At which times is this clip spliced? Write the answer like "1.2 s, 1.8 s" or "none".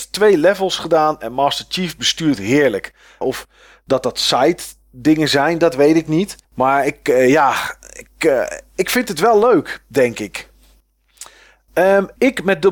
3.2 s, 6.4 s